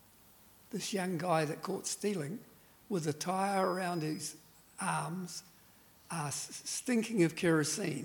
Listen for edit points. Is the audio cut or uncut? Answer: uncut